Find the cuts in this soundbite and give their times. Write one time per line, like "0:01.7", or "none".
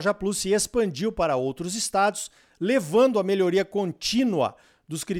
none